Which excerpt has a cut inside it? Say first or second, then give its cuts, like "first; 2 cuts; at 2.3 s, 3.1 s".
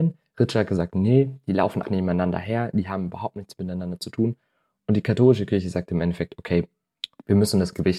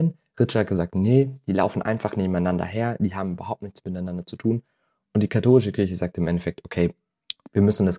first; 1 cut; at 1.8 s